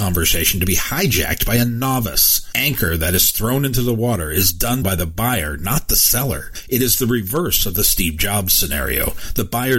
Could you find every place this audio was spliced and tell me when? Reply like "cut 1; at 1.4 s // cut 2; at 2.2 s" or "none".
cut 1; at 4.8 s